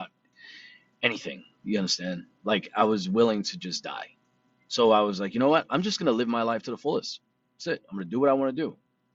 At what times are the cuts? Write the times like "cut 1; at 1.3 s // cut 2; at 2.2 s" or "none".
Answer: none